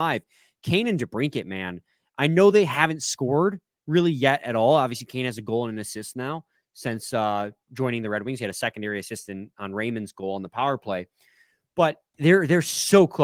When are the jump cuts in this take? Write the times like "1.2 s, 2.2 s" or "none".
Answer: 12.1 s